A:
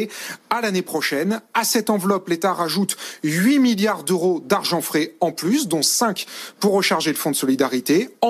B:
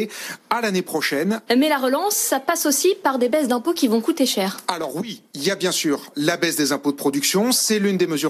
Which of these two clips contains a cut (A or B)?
B